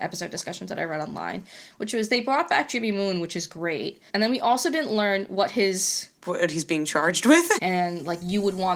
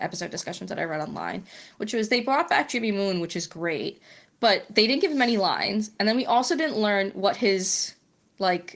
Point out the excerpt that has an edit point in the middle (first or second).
first